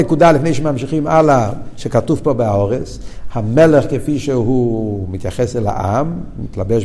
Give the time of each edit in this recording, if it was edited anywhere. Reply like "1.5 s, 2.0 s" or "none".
3.3 s